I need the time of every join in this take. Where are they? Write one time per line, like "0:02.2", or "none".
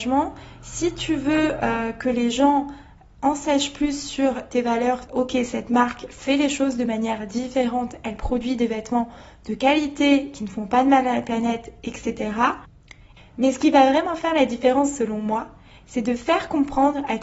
0:05.1
0:13.2